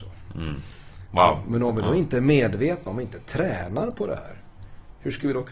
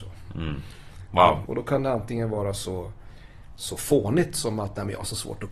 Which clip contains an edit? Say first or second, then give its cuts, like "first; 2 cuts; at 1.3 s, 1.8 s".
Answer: second; 1 cut; at 1.4 s